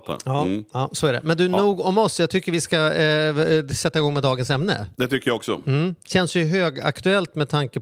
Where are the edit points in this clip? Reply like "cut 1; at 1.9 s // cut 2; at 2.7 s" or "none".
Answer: cut 1; at 4.9 s